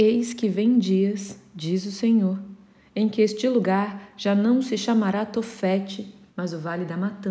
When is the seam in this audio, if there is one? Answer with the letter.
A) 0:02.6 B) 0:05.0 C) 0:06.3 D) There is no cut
C